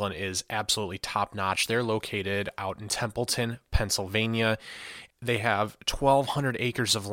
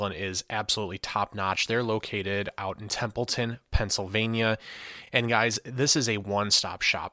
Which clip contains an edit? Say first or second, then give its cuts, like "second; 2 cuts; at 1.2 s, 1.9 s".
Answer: first; 1 cut; at 5.1 s